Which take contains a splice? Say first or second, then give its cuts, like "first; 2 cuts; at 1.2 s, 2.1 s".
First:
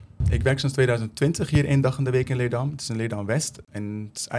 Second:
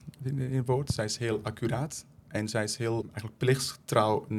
second; 1 cut; at 3.0 s